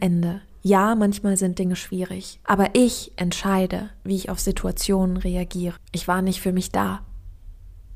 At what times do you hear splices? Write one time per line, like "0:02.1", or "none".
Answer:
0:02.4
0:05.8